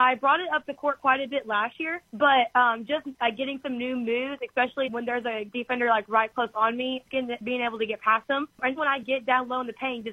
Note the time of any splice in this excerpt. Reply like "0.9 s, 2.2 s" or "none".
4.8 s, 8.8 s